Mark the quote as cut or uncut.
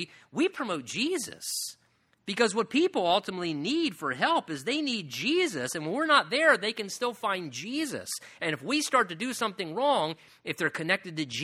uncut